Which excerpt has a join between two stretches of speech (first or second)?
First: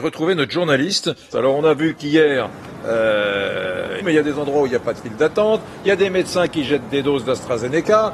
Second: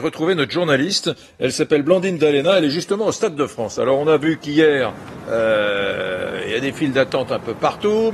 first